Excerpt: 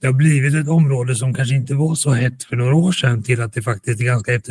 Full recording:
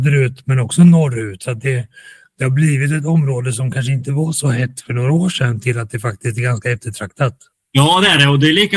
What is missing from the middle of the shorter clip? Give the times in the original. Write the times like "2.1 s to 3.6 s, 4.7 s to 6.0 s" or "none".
none